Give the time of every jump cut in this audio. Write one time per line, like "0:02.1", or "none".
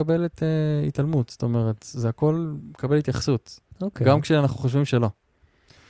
none